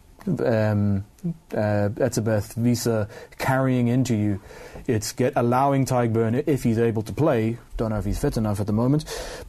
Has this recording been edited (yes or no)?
yes